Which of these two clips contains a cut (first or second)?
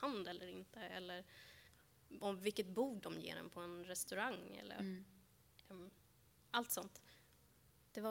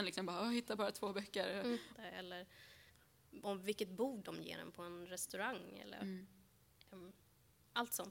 second